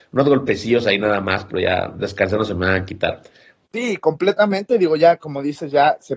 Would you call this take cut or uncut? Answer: cut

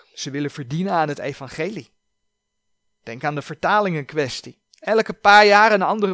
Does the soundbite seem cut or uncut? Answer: uncut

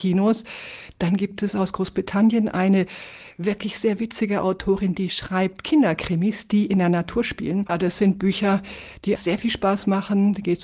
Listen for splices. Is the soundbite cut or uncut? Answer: cut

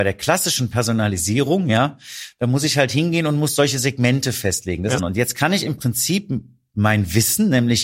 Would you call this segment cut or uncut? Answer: cut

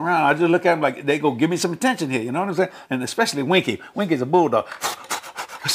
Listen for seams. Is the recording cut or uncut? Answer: cut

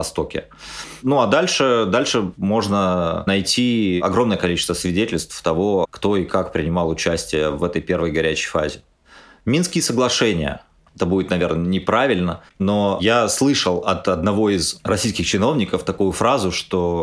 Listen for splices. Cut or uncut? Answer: cut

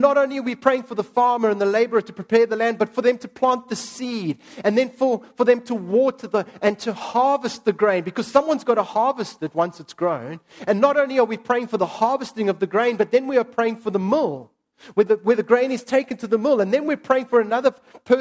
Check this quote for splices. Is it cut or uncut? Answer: uncut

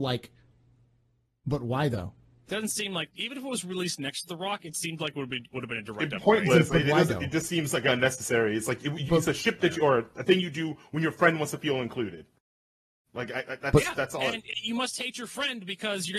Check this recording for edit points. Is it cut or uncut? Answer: uncut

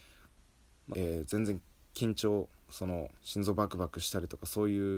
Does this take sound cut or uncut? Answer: cut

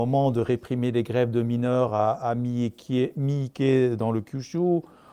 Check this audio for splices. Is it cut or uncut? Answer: uncut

